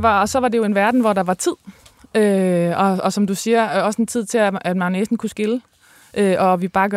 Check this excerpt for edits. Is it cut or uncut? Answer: uncut